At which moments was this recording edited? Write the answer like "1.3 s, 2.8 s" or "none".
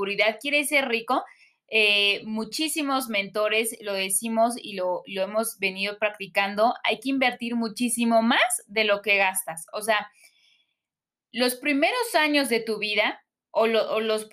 none